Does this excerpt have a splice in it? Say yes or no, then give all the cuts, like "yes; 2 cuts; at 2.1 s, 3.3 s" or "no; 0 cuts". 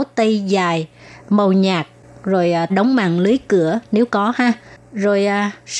yes; 1 cut; at 2.7 s